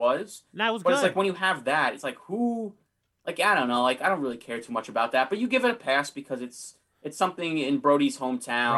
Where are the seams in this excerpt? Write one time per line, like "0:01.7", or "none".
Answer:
none